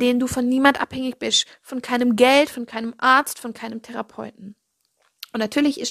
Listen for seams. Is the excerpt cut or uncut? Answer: uncut